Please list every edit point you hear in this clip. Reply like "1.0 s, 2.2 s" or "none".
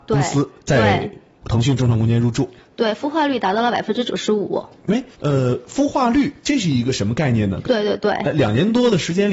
5.1 s, 7.6 s